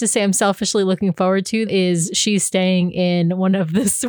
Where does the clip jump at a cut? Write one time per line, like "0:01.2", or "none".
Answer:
0:01.7